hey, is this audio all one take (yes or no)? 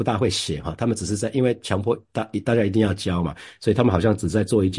yes